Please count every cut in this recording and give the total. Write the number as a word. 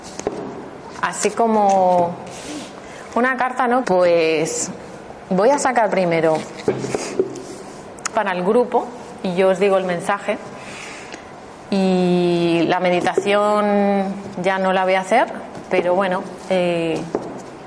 two